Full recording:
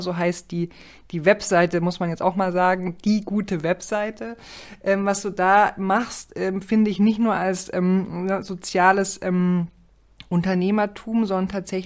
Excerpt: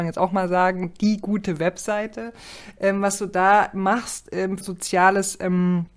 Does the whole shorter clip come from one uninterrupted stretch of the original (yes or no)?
no